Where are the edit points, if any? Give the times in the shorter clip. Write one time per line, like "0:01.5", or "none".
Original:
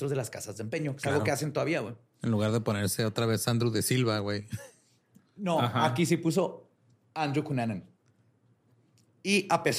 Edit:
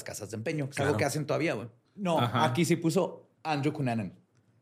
0:01.9
0:03.4

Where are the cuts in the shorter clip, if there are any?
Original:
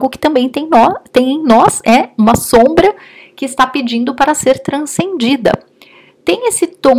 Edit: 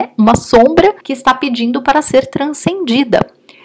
0:01.0

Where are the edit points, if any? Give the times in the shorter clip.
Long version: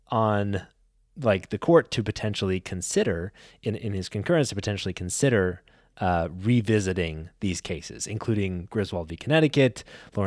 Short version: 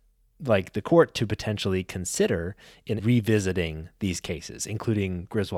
0:03.0

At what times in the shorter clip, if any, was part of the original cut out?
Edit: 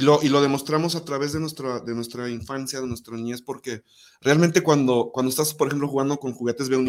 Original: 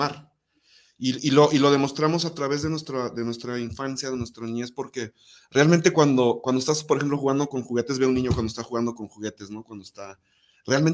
none

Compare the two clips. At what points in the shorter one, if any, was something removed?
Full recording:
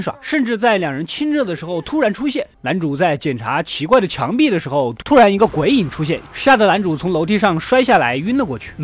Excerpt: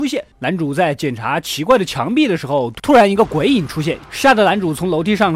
none

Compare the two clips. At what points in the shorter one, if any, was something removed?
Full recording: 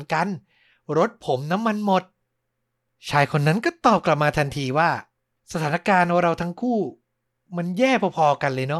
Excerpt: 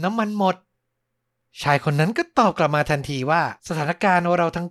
0:03.6

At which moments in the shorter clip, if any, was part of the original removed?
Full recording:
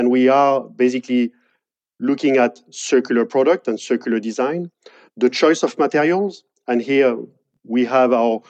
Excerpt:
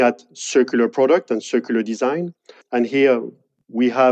0:02.6

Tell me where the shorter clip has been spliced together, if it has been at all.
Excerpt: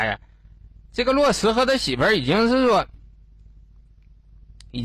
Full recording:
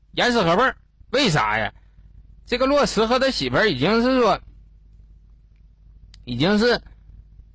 none

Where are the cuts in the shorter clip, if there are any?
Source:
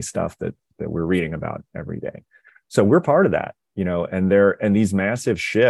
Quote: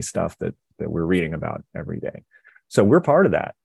none

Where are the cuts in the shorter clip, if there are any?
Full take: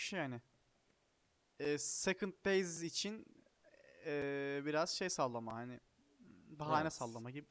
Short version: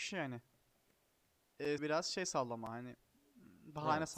0:01.8

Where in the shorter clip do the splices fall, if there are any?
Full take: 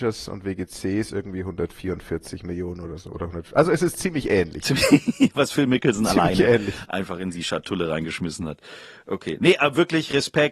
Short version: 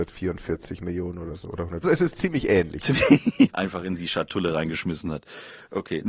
0:01.8
0:03.5

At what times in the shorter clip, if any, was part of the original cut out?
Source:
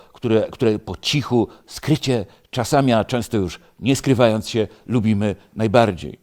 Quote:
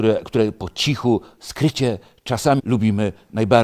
0:02.6

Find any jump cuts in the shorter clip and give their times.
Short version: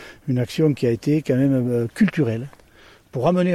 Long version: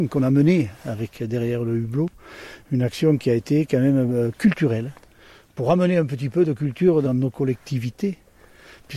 none

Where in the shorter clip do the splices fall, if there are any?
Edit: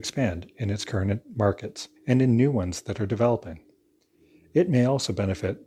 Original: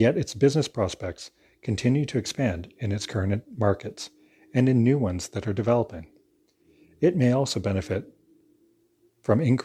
0:02.0

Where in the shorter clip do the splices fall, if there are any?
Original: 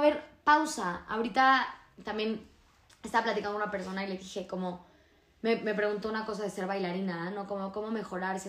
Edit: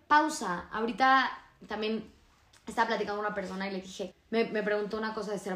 0:04.1

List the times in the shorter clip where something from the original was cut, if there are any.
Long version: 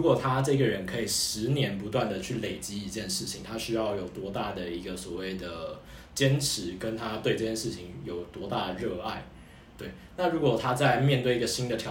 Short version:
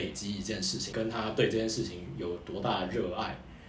0:00.9

